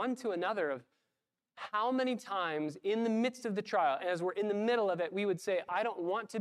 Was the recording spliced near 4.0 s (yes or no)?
yes